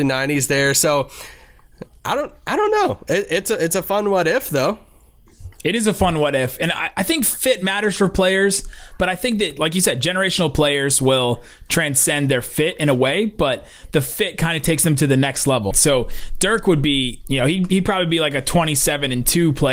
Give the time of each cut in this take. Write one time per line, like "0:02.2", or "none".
0:15.7